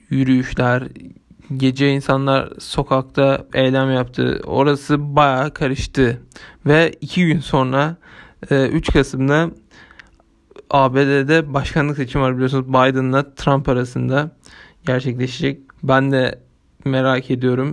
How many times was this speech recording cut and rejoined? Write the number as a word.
two